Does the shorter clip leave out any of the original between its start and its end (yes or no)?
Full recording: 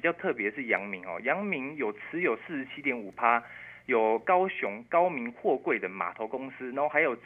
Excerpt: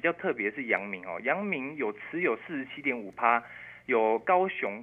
no